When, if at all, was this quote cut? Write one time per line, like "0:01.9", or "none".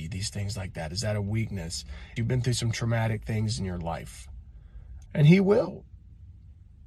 0:02.2
0:05.1